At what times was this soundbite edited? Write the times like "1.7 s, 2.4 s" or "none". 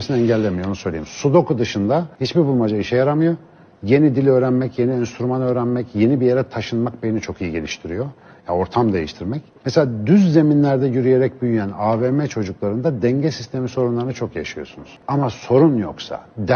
9.6 s, 15.0 s